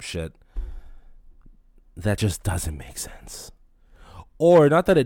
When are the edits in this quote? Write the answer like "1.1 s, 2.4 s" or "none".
none